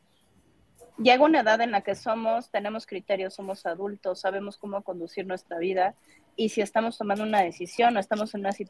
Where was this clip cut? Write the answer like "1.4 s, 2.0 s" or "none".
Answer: 0.9 s